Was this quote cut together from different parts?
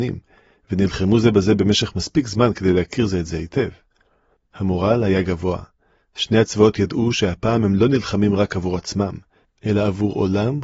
no; 0 cuts

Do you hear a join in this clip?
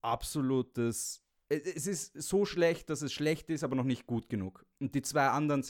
no; 0 cuts

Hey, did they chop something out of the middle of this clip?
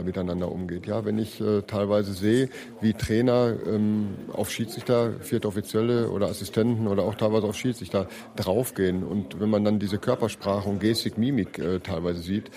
no; 0 cuts

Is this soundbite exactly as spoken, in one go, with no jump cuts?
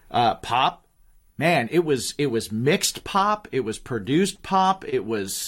yes; 0 cuts

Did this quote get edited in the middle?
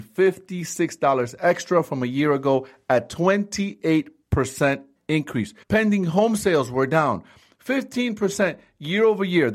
yes; 1 cut; at 5.6 s

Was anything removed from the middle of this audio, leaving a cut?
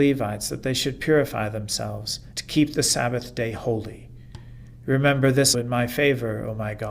yes; 2 cuts; at 2.3 s, 5.5 s

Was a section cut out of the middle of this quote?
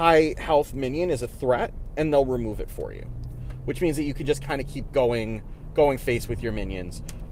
no; 0 cuts

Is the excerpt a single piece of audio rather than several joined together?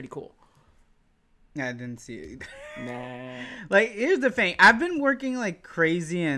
yes; 0 cuts

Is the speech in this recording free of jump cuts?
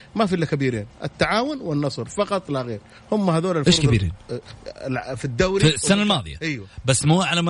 yes; 0 cuts

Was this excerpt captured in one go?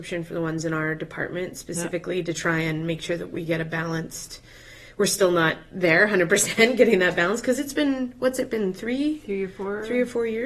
yes; 0 cuts

